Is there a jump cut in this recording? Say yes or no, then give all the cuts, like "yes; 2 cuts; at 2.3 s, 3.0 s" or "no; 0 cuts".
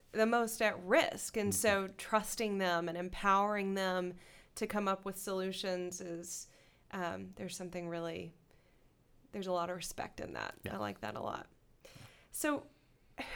no; 0 cuts